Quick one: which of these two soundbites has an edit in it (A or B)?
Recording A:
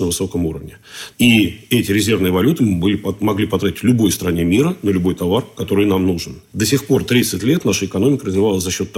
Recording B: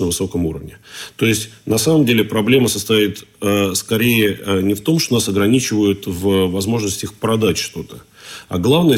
A